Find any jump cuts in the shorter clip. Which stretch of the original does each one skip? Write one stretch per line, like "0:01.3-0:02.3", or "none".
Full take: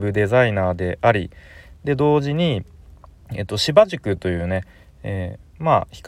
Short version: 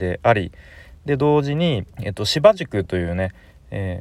0:02.7-0:03.2